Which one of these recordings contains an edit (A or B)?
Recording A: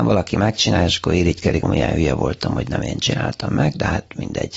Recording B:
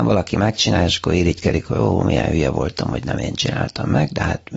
A